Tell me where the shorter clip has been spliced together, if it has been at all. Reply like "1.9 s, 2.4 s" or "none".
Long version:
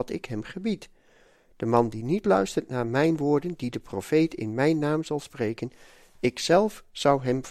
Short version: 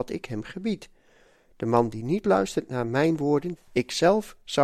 3.6 s